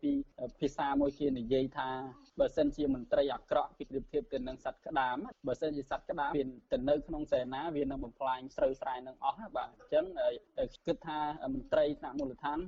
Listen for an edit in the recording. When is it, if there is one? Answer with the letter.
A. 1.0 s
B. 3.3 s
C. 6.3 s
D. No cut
C